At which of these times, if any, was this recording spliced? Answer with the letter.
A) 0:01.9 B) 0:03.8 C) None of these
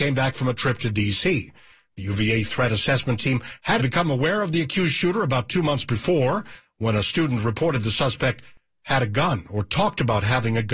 B